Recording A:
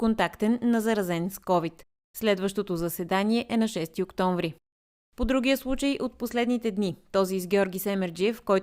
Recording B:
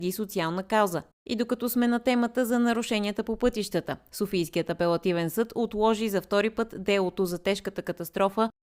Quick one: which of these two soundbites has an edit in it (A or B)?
B